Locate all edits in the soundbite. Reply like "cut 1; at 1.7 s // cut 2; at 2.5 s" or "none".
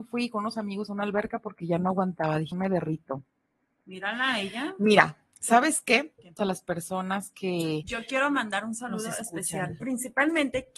cut 1; at 2.5 s // cut 2; at 6.4 s // cut 3; at 9.8 s